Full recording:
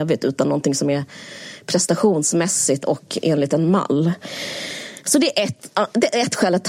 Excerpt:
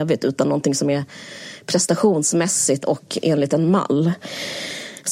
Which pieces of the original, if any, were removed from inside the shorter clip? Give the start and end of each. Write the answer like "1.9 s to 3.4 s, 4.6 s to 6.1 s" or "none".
none